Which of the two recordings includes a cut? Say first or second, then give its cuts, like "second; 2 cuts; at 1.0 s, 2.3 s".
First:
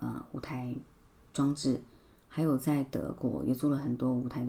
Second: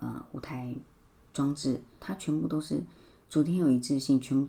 second; 1 cut; at 2.0 s